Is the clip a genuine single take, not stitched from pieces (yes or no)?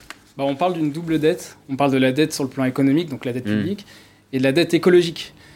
yes